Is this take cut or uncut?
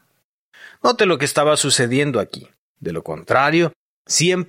cut